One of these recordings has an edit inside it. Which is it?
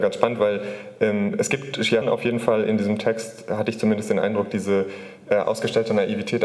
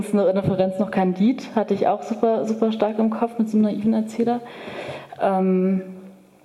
first; 1 cut; at 2.0 s

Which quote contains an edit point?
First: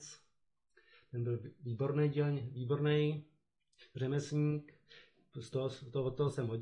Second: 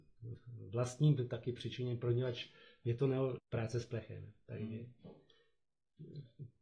second; 1 cut; at 3.4 s

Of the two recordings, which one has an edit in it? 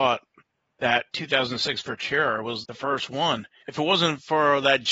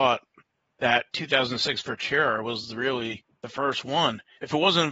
first; 1 cut; at 2.6 s

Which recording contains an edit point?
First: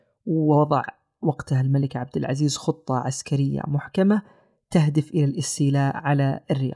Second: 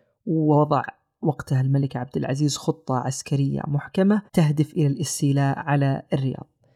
second; 1 cut; at 4.3 s

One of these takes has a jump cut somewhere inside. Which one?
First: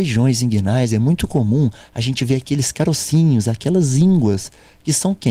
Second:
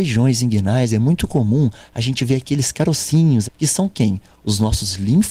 second; 1 cut; at 3.4 s

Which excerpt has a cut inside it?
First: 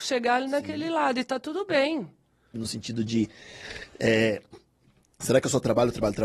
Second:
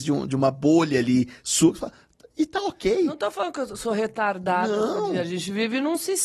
first; 1 cut; at 2.5 s

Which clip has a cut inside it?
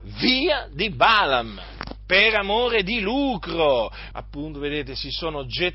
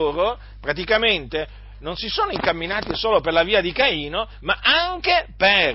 first; 1 cut; at 4.1 s

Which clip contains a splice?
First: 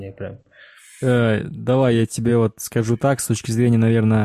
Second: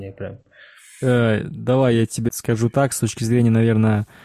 second; 1 cut; at 2.3 s

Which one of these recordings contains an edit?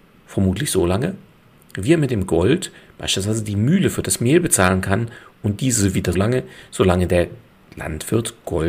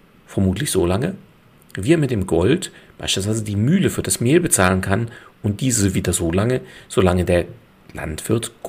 first; 1 cut; at 6.1 s

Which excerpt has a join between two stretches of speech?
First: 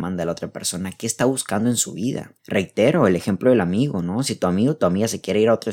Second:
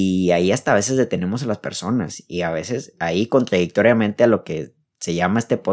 first; 1 cut; at 2.4 s

